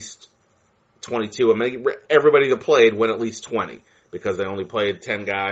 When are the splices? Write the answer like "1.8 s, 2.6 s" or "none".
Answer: none